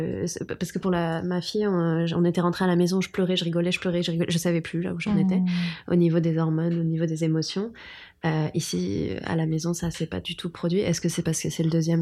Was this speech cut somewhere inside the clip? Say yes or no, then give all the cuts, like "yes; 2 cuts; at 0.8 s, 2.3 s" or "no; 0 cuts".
no; 0 cuts